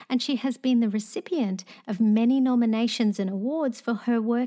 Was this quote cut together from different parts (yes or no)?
no